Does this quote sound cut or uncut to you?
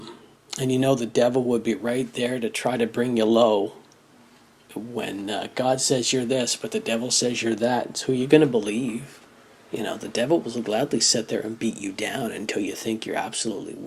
uncut